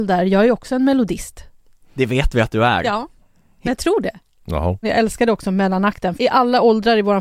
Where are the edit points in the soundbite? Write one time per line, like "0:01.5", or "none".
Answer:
0:04.8
0:06.2